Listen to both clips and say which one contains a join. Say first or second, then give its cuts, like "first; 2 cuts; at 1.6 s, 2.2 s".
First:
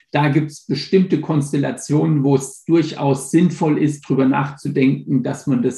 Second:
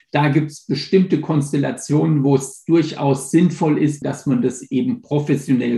second; 1 cut; at 4.0 s